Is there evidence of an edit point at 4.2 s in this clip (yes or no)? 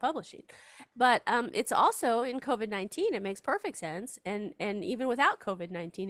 no